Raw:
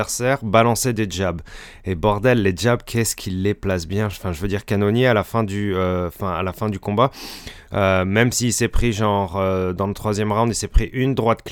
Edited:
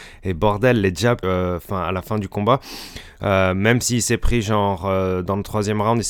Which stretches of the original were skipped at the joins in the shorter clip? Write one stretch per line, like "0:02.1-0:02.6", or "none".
0:02.8-0:05.7

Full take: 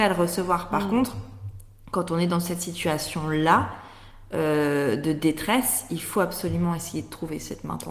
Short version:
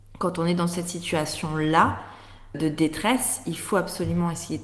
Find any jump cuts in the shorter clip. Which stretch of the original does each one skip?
0:04.3-0:05.0

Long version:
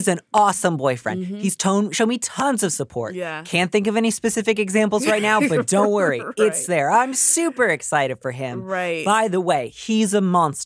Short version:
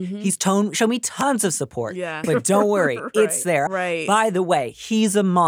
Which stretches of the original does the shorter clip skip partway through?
0:03.4-0:05.5
0:06.9-0:08.6

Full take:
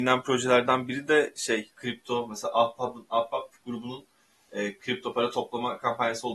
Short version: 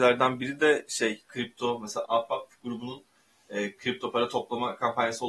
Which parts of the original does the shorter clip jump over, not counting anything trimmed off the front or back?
0:02.5-0:03.1

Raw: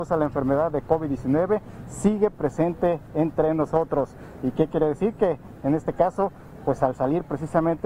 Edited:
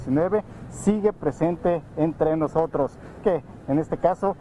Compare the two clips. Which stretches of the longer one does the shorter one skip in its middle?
0:04.4-0:05.2

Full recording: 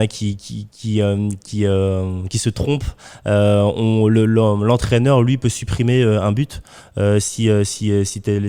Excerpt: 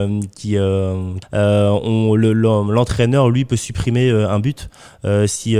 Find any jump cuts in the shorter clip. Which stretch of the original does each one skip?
0:02.3-0:03.2

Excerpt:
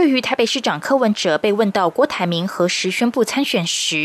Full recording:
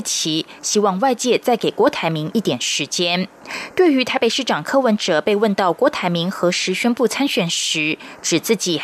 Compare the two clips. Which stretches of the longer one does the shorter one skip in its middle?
none

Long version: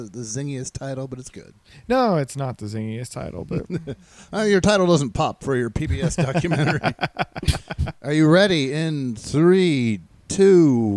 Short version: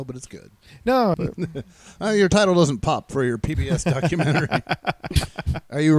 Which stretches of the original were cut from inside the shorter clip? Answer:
0:02.2-0:03.5

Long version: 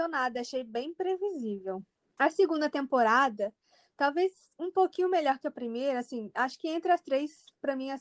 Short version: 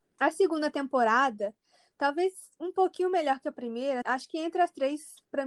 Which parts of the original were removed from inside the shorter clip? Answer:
0:06.0-0:06.3

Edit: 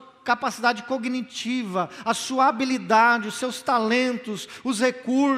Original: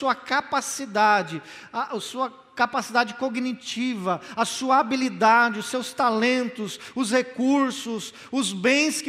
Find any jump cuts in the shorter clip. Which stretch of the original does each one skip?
none

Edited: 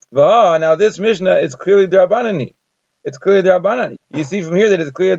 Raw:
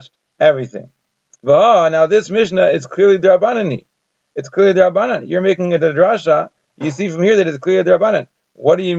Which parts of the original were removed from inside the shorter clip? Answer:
0:05.3-0:06.6

